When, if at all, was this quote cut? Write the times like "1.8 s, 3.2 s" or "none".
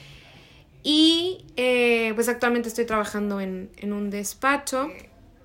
none